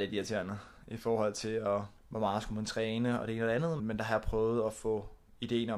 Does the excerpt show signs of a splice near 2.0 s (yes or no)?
yes